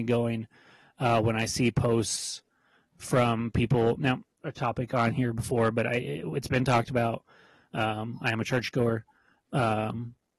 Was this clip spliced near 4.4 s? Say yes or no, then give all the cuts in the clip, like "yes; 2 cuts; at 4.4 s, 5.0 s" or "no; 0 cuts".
yes; 1 cut; at 4.4 s